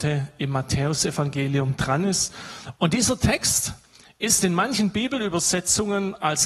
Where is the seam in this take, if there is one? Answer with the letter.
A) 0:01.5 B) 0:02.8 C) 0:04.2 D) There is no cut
B